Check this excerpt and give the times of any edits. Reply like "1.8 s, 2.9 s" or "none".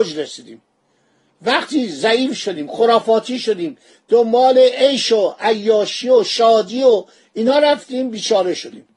none